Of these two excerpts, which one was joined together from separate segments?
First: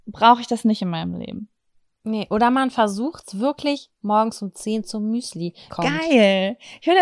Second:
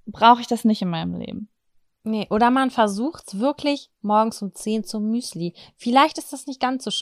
first; 1 cut; at 5.7 s

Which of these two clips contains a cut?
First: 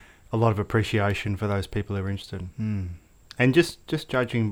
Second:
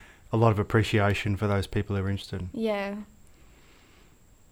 first; 1 cut; at 2.5 s

